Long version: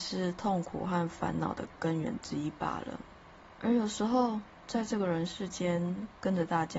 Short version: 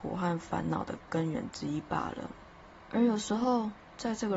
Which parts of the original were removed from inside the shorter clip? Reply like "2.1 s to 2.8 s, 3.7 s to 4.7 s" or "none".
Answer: none